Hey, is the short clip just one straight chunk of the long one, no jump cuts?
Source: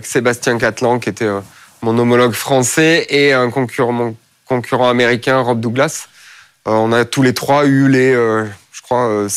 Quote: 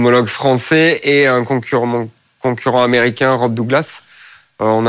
yes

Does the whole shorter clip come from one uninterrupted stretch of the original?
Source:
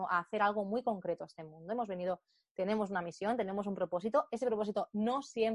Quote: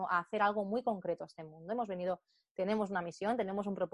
yes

